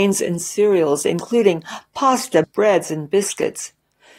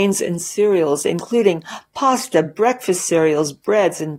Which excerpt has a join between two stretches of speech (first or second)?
first